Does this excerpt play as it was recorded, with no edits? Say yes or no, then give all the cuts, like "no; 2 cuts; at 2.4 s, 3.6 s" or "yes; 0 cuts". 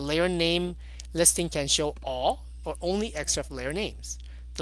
no; 1 cut; at 2.6 s